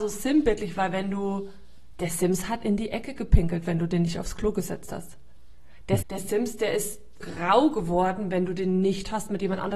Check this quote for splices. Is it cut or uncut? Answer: cut